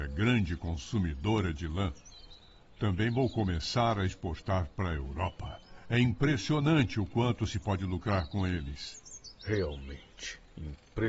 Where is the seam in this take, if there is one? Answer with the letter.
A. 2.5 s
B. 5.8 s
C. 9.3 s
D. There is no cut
D